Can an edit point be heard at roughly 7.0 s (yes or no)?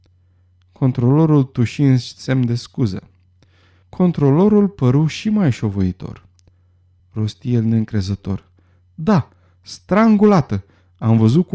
yes